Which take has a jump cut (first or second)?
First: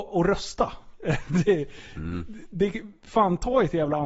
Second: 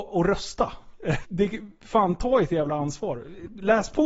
second